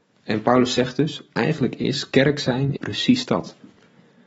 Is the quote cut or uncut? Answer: cut